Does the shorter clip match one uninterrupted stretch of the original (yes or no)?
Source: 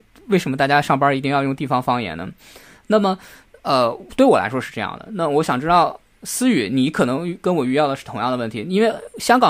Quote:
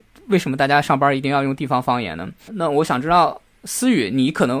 no